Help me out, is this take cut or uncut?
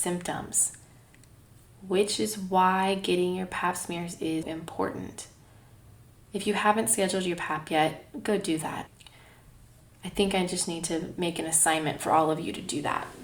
cut